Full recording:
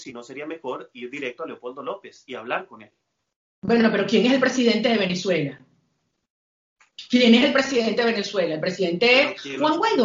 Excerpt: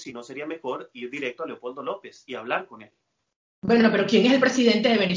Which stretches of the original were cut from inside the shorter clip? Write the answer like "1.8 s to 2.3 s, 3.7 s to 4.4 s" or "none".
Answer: none